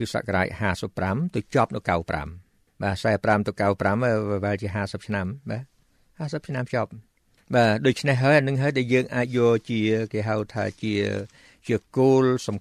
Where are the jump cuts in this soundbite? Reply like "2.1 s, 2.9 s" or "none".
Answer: none